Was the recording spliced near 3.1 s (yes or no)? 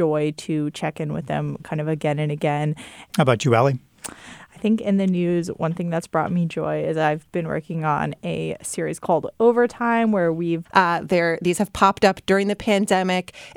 yes